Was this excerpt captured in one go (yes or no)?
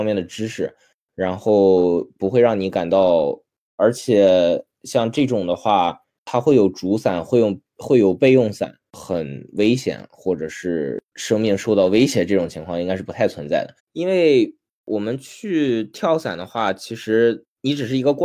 no